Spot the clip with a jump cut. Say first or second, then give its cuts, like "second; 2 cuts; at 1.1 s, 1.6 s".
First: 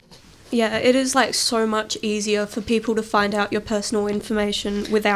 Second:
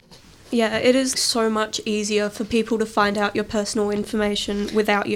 second; 1 cut; at 1.1 s